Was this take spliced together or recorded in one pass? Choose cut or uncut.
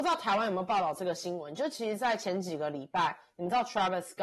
uncut